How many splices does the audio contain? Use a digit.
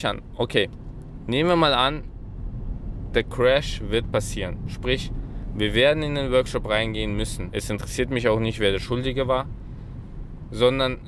1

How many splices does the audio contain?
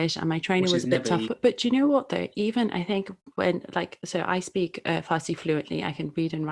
1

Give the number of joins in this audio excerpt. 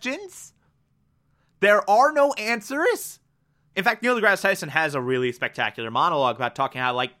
1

